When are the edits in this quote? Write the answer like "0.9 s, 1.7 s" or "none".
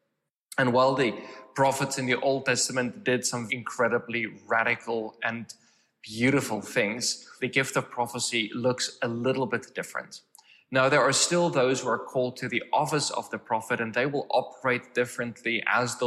3.5 s, 7.4 s